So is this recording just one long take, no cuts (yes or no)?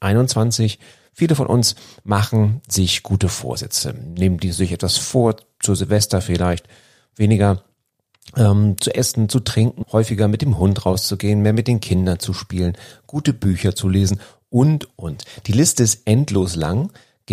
no